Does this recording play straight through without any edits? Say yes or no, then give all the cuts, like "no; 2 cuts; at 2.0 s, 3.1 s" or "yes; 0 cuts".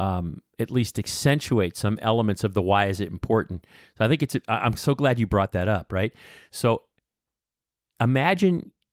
yes; 0 cuts